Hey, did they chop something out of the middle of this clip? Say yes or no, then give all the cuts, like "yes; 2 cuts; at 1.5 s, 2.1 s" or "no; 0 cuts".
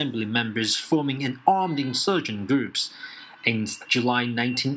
no; 0 cuts